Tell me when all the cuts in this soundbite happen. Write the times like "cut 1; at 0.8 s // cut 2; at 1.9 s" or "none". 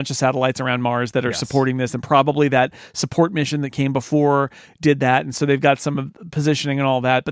none